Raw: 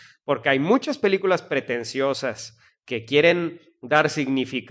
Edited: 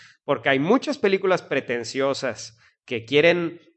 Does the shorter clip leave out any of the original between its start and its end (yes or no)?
no